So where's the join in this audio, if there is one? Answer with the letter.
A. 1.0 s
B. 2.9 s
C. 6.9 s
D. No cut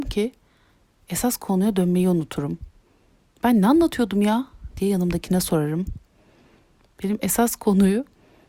C